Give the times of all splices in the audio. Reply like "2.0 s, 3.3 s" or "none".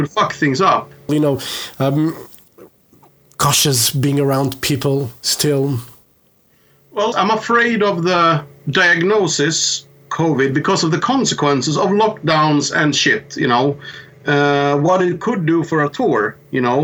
1.1 s, 7.1 s